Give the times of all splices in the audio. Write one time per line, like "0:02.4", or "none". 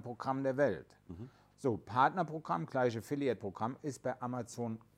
0:01.5